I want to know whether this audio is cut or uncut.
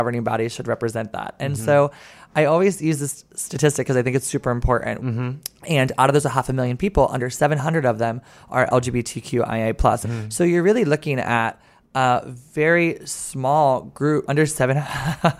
cut